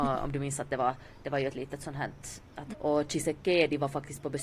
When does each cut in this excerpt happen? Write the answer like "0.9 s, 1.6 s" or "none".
2.7 s